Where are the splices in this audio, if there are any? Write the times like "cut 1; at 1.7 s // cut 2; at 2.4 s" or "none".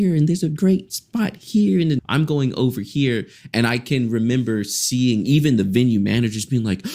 cut 1; at 2.0 s